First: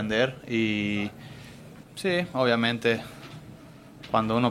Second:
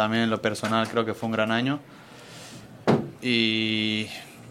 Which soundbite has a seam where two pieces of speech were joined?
first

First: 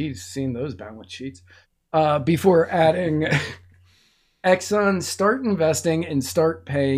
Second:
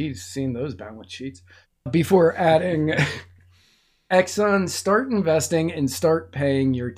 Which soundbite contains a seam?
second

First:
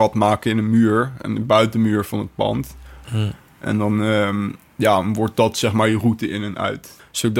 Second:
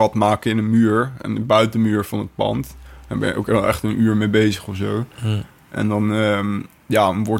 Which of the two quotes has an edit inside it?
first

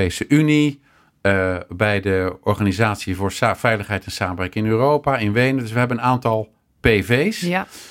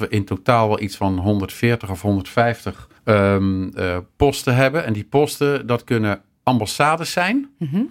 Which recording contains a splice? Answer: second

